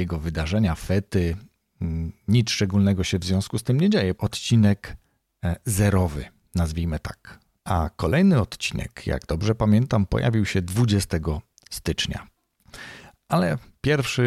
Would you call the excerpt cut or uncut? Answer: cut